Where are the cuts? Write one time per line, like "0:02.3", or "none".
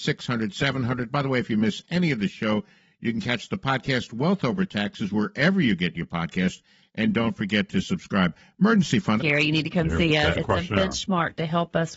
0:09.2
0:10.3